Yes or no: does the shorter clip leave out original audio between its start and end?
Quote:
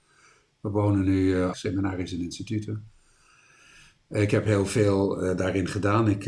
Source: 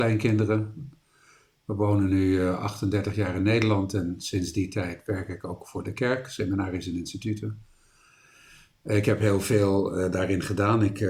yes